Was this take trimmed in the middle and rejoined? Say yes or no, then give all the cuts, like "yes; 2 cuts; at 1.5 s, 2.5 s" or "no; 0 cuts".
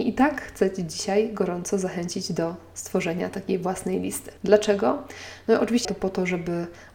yes; 2 cuts; at 4.4 s, 5.8 s